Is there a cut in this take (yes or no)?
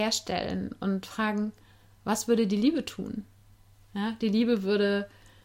no